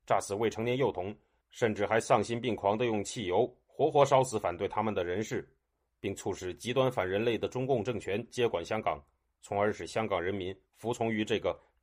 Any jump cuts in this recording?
yes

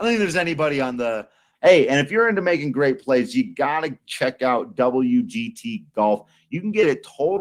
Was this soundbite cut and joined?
yes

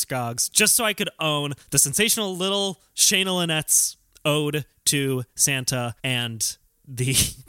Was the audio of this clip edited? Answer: yes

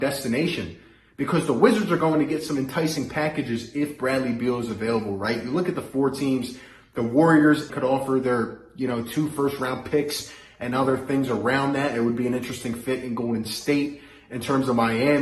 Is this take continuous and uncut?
no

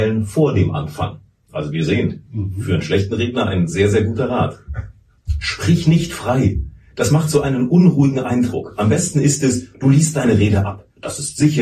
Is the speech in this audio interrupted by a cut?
no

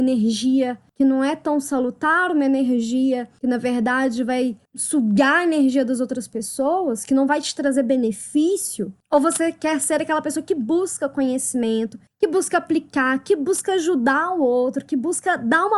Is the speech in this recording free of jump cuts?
yes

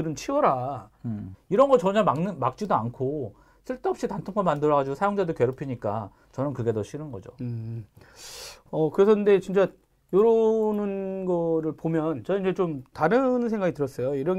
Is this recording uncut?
no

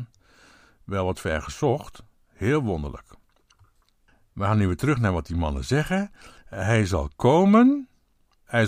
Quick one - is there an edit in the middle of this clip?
yes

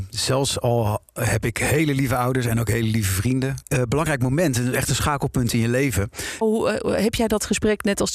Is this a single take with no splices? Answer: no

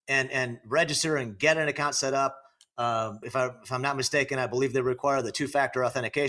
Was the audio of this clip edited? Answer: yes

